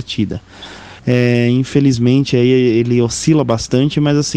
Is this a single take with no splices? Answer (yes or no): no